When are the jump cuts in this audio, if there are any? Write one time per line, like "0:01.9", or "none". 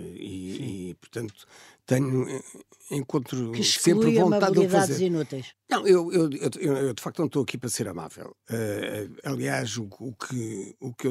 0:05.5